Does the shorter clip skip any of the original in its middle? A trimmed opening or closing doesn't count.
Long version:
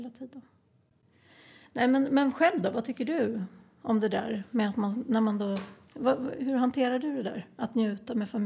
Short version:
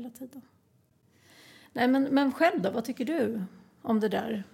no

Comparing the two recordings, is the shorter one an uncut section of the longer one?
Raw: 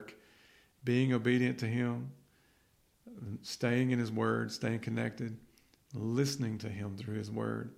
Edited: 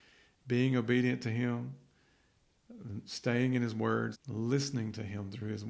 no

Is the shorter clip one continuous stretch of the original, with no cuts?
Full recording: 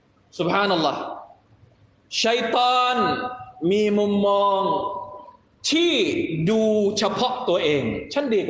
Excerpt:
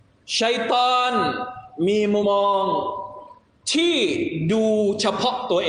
no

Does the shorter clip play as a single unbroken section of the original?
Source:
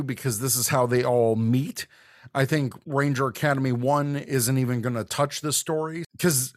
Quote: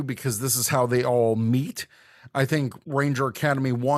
yes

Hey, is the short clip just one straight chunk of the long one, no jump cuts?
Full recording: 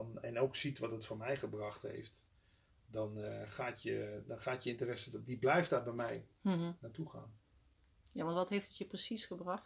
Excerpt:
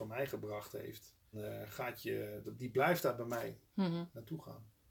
no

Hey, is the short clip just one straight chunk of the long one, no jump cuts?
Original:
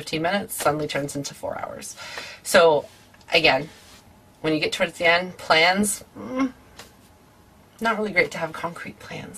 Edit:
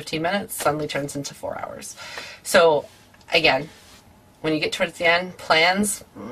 yes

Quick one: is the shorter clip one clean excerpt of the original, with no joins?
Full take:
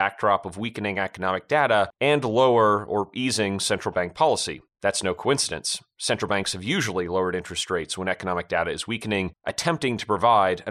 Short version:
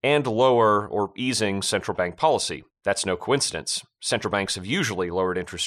yes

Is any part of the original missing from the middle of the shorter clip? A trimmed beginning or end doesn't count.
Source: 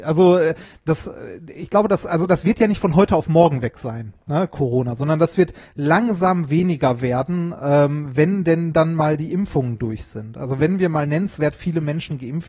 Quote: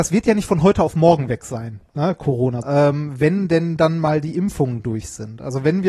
yes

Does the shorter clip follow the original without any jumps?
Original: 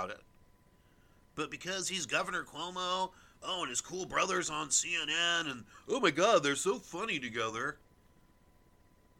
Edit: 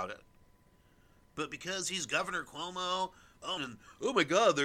no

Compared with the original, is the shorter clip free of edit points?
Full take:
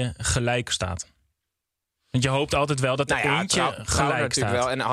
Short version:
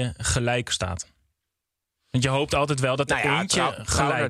yes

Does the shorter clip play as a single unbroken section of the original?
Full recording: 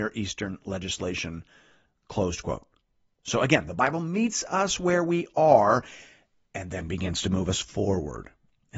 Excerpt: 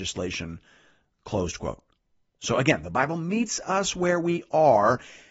yes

